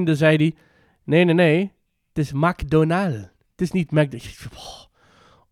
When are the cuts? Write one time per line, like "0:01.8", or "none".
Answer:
none